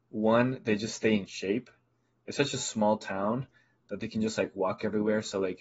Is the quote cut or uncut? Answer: uncut